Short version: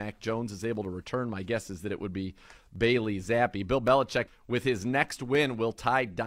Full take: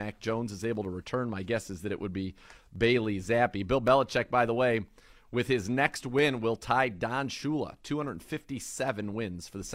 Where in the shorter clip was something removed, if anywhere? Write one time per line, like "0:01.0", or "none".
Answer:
0:04.3